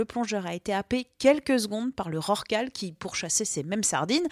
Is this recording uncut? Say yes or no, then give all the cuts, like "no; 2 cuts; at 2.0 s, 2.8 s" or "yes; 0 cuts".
yes; 0 cuts